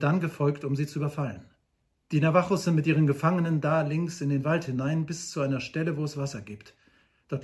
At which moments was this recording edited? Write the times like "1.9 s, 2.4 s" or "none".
2.0 s